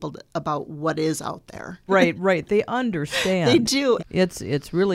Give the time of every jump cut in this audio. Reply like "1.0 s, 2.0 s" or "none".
1.9 s, 4.0 s